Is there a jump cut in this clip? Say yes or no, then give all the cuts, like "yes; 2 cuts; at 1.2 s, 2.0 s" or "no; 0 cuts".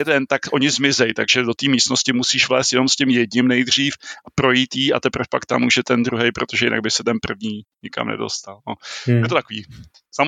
no; 0 cuts